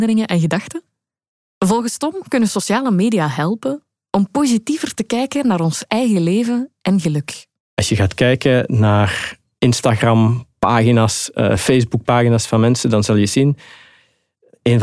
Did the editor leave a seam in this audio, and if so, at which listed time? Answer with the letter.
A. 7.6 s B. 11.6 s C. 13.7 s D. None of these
D